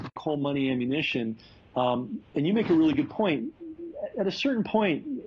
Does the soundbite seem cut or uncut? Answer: uncut